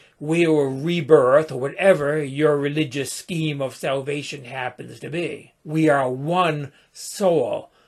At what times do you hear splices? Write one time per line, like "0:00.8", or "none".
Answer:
0:05.6